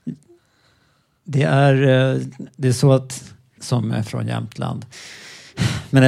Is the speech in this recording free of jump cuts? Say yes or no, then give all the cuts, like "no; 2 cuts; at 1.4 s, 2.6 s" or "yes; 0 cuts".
no; 2 cuts; at 3.6 s, 4.9 s